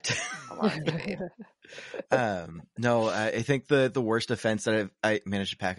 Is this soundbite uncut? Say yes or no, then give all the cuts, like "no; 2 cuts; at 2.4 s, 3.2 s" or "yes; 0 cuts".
yes; 0 cuts